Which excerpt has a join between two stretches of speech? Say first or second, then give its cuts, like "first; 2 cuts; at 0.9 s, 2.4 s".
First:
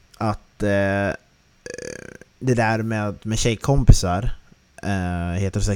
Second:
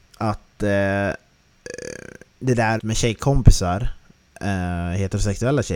second; 1 cut; at 2.8 s